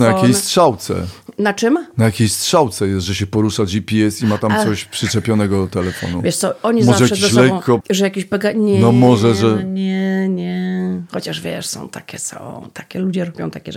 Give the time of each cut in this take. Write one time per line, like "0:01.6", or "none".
0:07.8

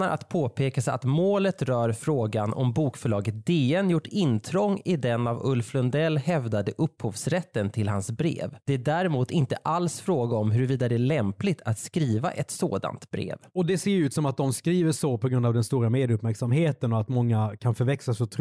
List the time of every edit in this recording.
0:08.6

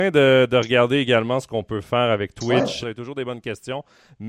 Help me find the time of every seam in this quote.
0:02.8

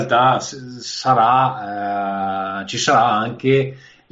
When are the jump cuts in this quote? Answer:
none

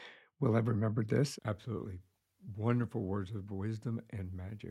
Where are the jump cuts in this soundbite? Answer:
0:01.4

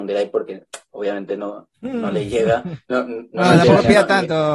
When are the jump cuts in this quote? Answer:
none

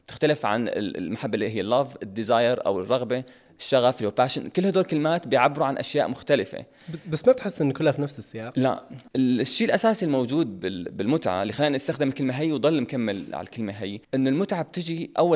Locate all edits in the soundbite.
0:09.1
0:14.0

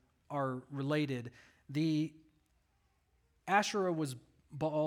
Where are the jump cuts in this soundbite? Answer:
none

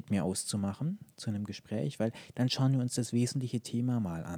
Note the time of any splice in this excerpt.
none

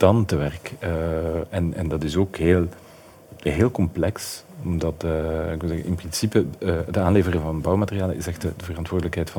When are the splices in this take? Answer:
none

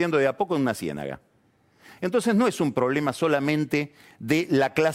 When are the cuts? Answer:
none

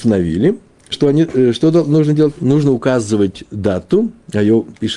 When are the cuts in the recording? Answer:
0:00.9

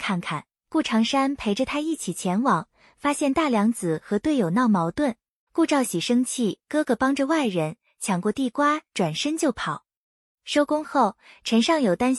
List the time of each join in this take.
0:05.5

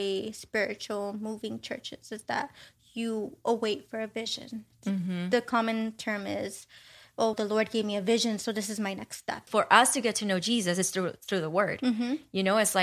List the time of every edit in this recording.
0:07.3
0:09.5

